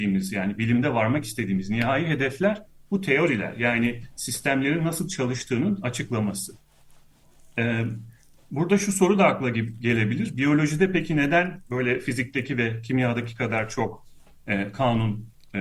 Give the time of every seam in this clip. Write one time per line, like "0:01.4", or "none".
none